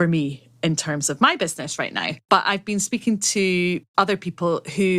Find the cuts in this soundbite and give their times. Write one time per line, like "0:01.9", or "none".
none